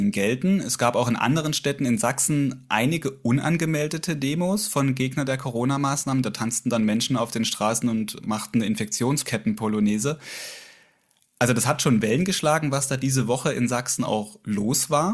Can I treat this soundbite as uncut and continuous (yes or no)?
yes